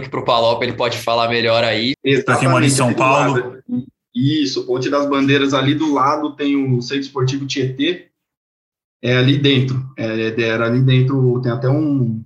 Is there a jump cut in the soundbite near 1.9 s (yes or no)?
yes